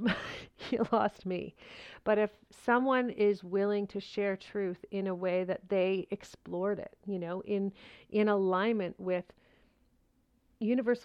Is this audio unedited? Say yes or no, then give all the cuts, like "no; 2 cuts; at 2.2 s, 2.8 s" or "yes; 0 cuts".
yes; 0 cuts